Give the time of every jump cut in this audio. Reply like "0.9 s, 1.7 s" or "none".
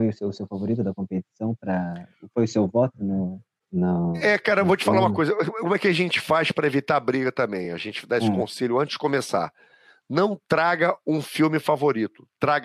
none